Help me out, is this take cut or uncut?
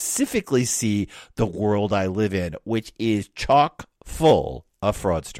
uncut